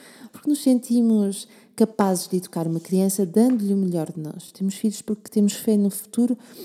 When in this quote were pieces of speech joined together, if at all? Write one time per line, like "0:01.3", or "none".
none